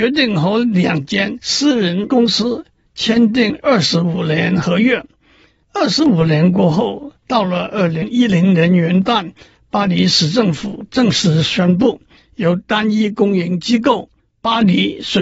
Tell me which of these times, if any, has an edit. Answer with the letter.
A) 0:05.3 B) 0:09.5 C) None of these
C